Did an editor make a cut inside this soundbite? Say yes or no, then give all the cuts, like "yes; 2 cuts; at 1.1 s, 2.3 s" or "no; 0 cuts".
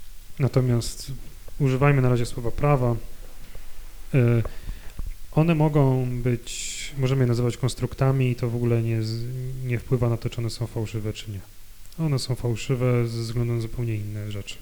no; 0 cuts